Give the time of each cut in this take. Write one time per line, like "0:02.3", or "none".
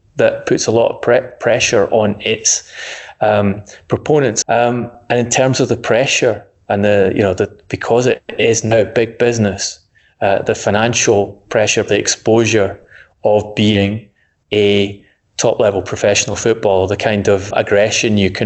0:04.4
0:11.9
0:17.5

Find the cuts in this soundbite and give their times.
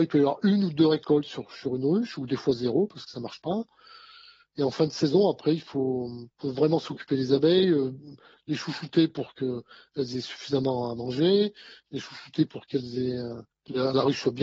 none

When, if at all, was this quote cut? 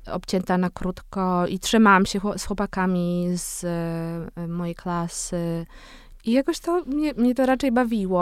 0:06.2

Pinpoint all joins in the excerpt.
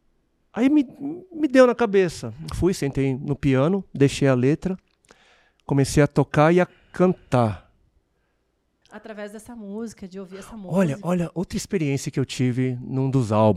0:08.8

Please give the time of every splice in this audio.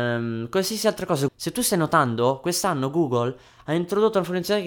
0:01.3

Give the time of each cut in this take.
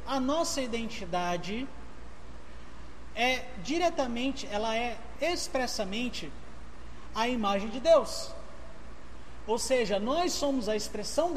none

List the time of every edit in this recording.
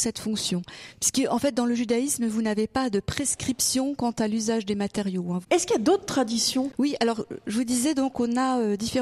0:05.4

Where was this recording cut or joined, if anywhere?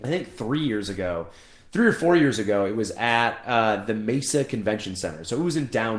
none

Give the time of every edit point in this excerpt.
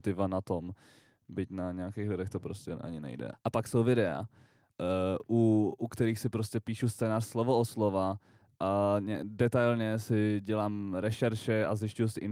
0:03.3

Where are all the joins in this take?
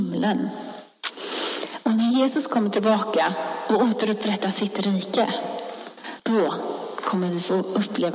0:06.2

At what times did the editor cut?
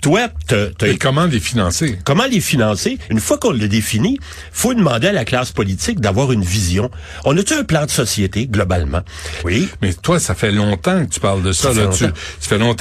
0:03.1
0:09.4

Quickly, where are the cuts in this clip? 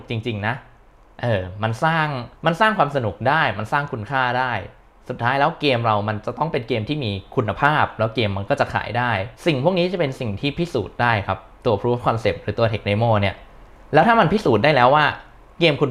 0:02.4
0:09.4

